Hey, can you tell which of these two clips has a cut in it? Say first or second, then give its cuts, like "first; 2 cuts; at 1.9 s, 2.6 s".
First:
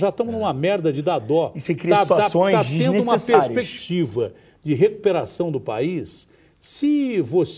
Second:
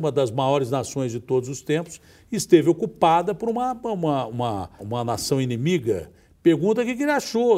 second; 1 cut; at 4.8 s